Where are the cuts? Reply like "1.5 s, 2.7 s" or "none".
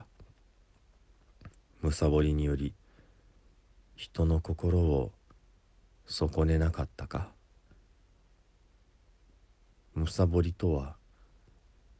none